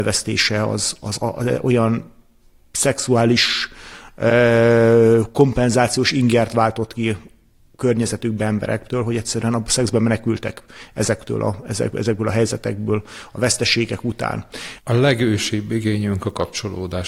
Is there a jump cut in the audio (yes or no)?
yes